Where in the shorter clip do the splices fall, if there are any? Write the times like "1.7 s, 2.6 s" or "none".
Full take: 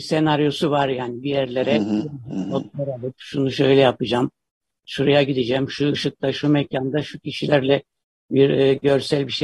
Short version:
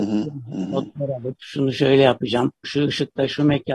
2.6 s